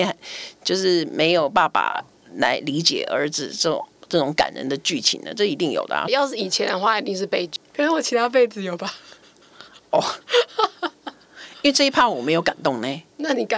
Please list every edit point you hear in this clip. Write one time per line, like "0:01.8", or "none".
0:06.1
0:07.7